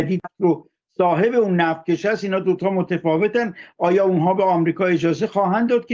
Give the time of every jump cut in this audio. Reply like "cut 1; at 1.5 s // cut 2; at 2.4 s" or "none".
none